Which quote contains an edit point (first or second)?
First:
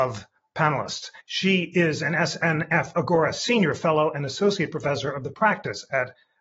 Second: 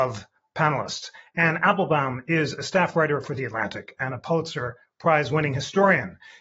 first